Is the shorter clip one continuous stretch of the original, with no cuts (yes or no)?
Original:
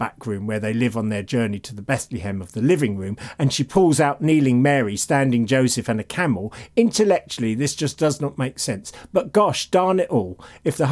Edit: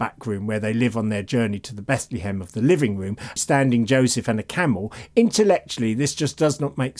no